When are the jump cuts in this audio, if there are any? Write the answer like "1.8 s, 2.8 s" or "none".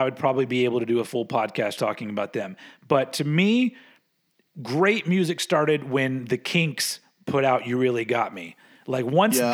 1.8 s